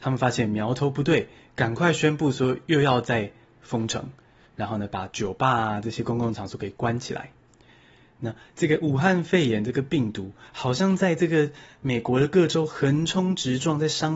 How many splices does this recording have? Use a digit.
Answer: 0